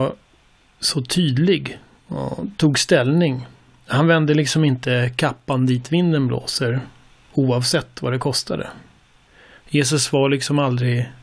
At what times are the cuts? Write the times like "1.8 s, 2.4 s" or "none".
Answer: none